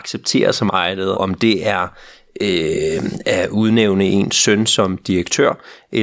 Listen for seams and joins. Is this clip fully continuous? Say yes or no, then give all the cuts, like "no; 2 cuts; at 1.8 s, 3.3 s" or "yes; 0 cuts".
no; 1 cut; at 1.1 s